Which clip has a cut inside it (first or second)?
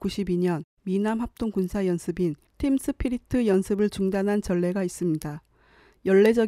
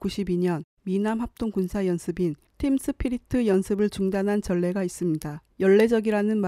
second